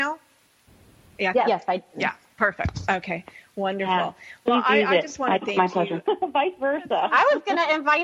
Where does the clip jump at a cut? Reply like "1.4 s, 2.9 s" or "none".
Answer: 6.0 s